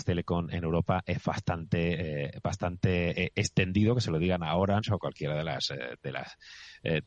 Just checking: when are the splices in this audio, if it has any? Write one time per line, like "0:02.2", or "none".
none